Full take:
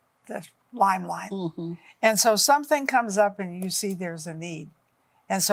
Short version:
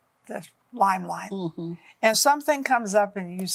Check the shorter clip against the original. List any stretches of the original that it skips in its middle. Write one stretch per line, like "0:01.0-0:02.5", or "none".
0:02.1-0:02.4